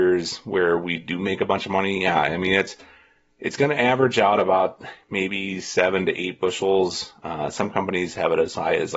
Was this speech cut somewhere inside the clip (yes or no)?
no